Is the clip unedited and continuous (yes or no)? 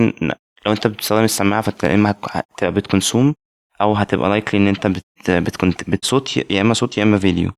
no